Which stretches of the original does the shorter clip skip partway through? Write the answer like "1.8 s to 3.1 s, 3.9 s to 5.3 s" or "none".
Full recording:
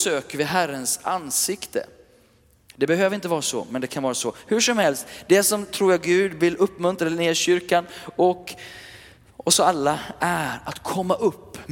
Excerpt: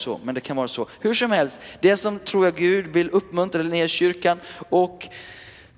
none